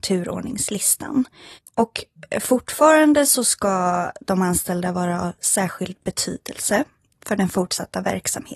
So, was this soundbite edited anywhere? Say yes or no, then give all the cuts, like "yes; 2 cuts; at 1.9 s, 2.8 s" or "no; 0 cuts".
no; 0 cuts